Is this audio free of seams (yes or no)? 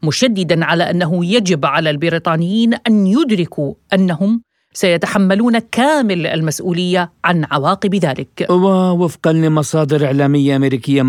yes